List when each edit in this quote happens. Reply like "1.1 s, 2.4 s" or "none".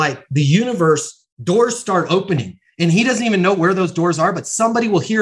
1.3 s